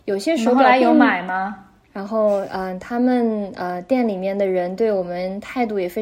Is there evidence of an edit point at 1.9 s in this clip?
yes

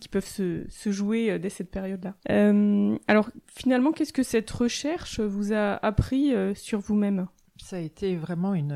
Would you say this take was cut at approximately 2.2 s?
yes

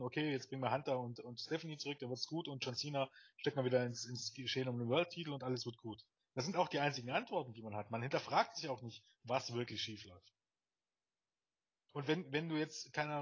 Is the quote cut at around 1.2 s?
no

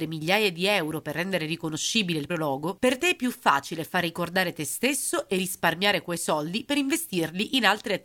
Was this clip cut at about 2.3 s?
yes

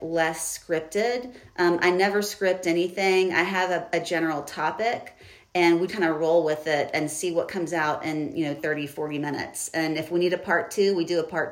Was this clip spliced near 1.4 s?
no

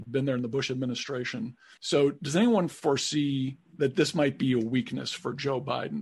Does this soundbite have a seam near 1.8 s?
yes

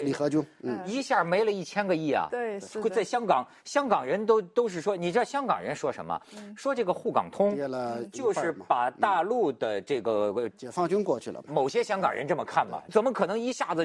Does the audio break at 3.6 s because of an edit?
no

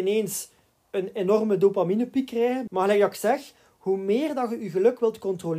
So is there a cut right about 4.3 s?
no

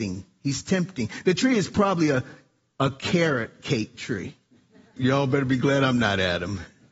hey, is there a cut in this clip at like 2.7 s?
no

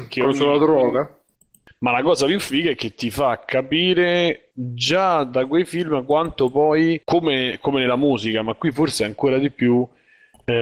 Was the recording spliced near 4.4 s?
no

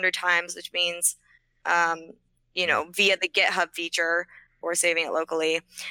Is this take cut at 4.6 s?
yes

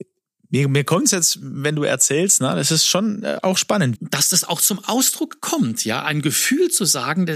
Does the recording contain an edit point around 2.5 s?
no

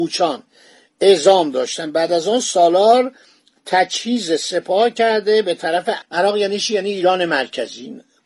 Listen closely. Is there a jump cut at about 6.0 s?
yes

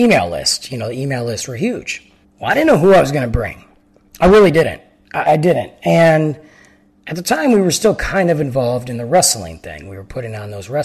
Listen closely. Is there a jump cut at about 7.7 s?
no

